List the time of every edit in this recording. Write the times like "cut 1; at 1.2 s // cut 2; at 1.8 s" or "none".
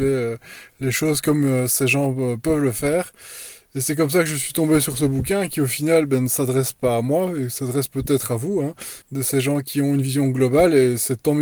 cut 1; at 9.0 s